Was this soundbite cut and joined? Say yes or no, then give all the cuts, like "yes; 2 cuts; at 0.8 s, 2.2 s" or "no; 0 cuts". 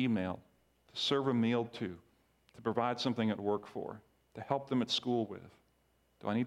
no; 0 cuts